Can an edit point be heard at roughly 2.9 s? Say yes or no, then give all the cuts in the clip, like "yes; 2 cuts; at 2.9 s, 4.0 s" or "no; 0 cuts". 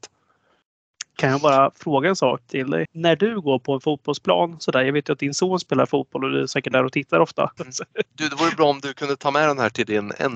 yes; 2 cuts; at 2.9 s, 7.6 s